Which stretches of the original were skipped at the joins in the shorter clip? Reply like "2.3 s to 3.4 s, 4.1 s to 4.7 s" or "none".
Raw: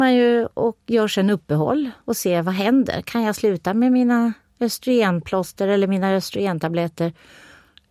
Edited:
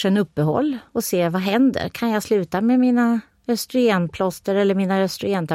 none